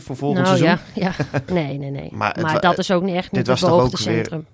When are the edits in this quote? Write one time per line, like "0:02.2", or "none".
0:01.5

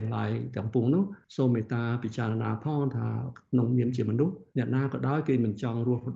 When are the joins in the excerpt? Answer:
0:04.5

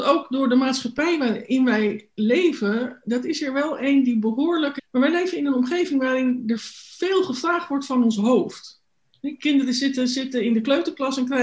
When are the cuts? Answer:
0:04.8

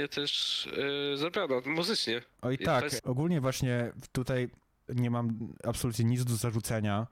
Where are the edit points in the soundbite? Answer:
0:03.0
0:04.9

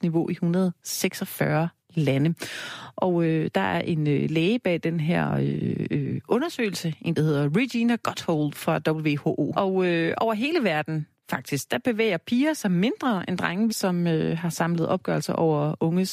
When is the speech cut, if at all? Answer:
0:09.5
0:13.7

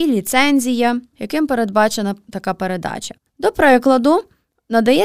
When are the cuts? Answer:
0:01.1
0:03.2

